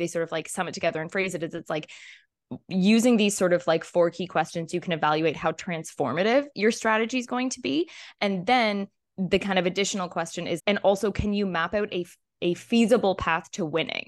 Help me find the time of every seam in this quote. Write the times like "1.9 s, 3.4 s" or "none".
10.6 s, 12.4 s